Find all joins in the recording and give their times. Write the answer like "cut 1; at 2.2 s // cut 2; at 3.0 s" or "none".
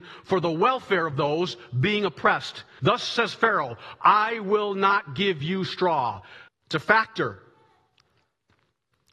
cut 1; at 2.8 s // cut 2; at 6.5 s